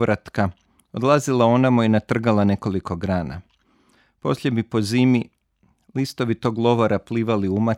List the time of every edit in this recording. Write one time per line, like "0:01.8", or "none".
none